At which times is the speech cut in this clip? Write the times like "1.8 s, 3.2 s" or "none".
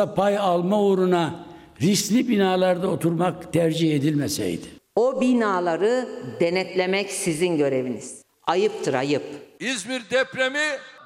4.8 s, 8.3 s

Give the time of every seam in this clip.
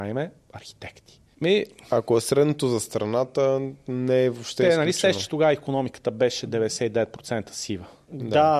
1.3 s

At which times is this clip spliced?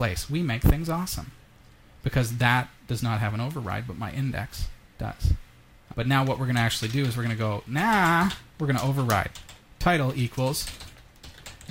5.9 s

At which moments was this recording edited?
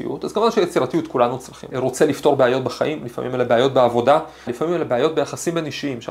1.7 s, 4.5 s

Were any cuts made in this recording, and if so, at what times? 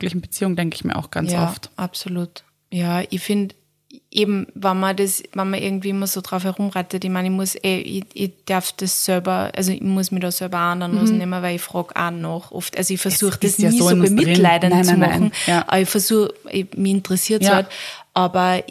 none

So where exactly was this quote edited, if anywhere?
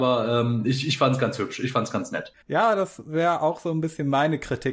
2.4 s

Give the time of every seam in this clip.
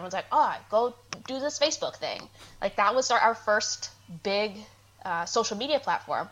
none

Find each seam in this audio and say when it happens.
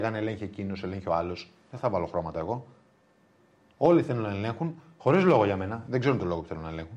none

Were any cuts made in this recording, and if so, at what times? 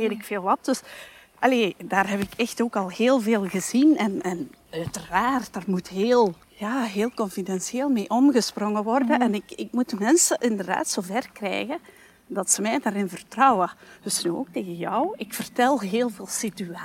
6.4 s

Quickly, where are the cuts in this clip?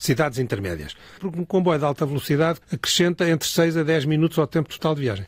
1.2 s, 2.6 s

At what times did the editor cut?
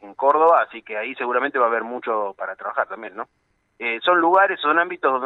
none

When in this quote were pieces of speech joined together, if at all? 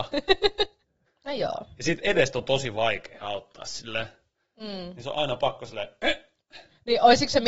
1.1 s

